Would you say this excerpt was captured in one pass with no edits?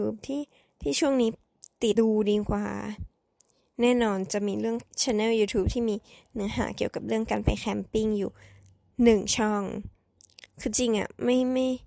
no; 2 cuts; at 2.0 s, 4.9 s

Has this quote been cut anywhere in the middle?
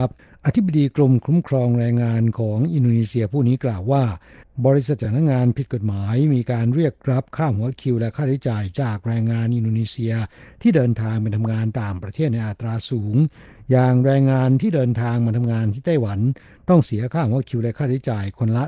no; 0 cuts

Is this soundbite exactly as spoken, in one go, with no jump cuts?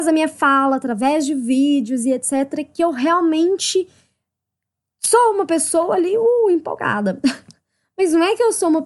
yes; 0 cuts

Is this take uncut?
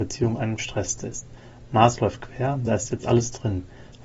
yes; 0 cuts

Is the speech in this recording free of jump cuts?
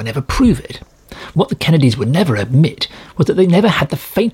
yes; 0 cuts

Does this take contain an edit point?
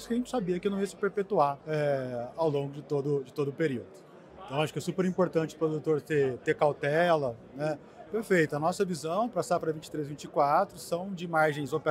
yes; 3 cuts; at 1.6 s, 4.4 s, 8.1 s

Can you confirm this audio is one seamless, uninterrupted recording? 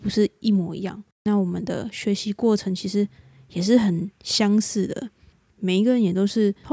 no; 1 cut; at 5.5 s

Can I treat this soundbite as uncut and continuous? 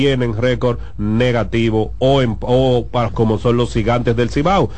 no; 1 cut; at 3.1 s

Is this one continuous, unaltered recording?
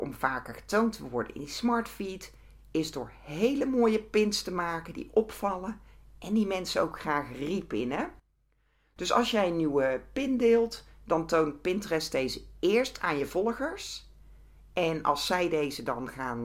yes; 0 cuts

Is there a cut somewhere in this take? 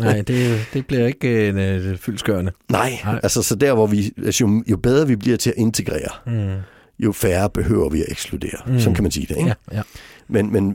no; 0 cuts

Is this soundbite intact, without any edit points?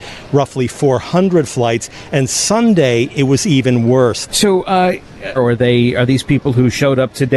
no; 2 cuts; at 4.3 s, 5.4 s

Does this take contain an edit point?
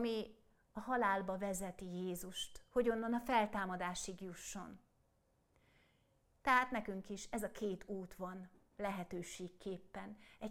no; 0 cuts

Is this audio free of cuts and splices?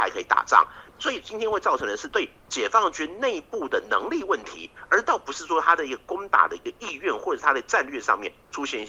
yes; 0 cuts

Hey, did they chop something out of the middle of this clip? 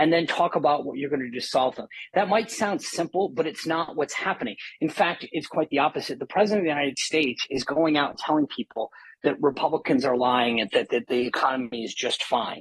no; 0 cuts

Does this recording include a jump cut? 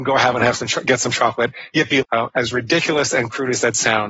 yes; 1 cut; at 2.0 s

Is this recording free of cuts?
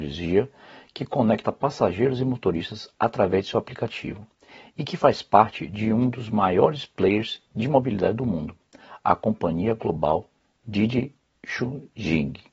yes; 0 cuts

